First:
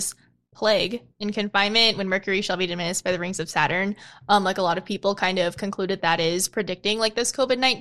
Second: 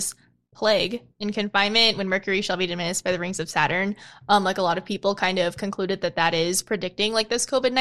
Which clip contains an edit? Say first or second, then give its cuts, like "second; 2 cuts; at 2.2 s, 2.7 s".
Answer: first; 1 cut; at 6.0 s